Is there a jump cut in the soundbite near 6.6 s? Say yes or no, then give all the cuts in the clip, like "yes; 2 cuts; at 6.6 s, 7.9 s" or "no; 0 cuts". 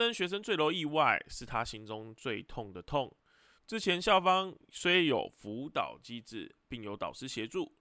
no; 1 cut; at 3.6 s